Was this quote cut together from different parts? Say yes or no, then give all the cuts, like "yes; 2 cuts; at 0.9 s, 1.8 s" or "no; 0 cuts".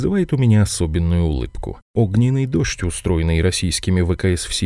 yes; 1 cut; at 1.9 s